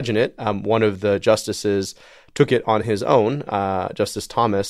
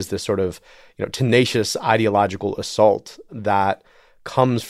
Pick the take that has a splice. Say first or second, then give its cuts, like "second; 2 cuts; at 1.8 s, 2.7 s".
second; 1 cut; at 3.3 s